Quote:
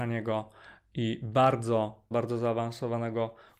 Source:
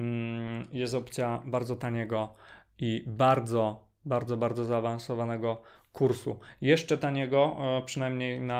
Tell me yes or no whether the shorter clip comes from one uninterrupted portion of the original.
no